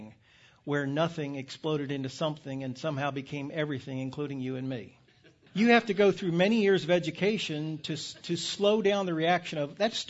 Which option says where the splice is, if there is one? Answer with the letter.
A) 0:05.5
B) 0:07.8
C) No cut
A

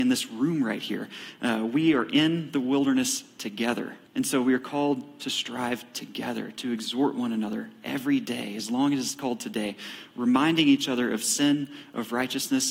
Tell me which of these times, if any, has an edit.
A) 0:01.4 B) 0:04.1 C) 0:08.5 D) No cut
B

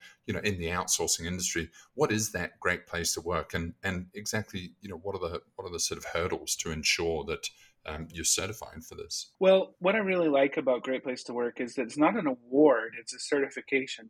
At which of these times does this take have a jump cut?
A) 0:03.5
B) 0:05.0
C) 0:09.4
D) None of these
C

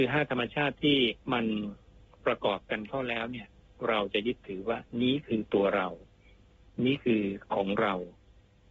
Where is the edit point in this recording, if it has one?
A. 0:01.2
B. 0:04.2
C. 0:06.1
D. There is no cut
A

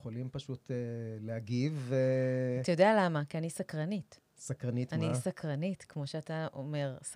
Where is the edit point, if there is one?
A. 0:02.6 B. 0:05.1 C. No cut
C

